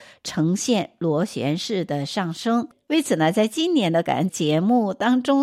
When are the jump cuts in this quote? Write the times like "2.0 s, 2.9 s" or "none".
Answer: 4.3 s

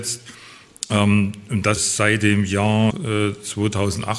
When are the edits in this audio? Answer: 1.8 s, 2.9 s

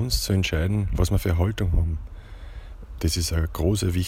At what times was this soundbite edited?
3.0 s

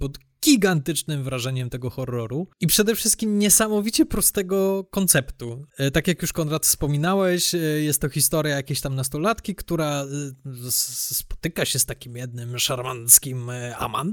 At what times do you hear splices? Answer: none

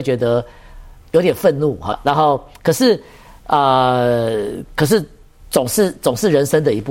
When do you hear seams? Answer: 1.9 s

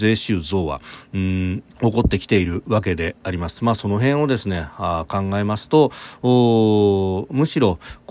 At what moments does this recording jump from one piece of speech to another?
1.7 s

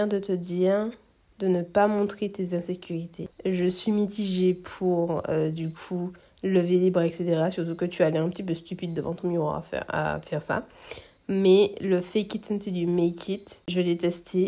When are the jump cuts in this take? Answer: 3.3 s

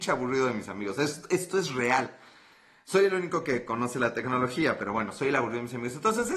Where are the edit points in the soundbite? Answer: none

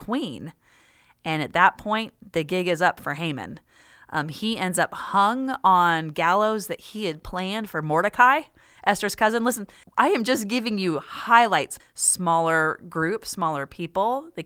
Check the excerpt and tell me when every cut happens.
9.8 s, 11.8 s

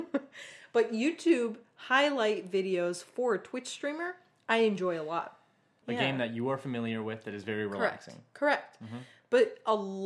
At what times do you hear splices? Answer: 5.8 s

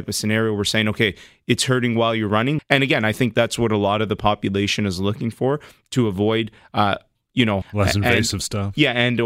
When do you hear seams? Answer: 2.6 s, 7.6 s

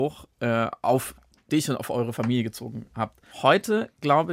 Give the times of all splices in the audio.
3.3 s

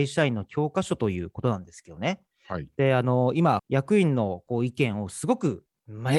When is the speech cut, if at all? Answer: 3.6 s

